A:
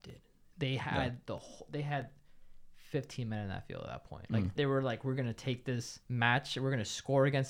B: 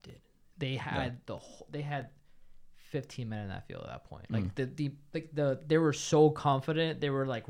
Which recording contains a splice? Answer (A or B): A